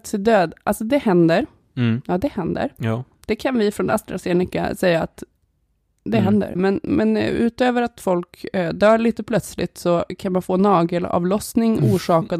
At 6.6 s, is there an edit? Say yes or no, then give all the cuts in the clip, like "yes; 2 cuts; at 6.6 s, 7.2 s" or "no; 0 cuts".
yes; 1 cut; at 6.6 s